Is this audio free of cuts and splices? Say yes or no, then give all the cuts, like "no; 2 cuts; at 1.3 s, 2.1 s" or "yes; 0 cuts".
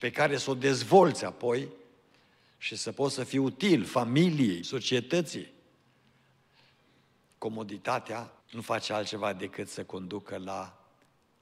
no; 2 cuts; at 4.6 s, 8.4 s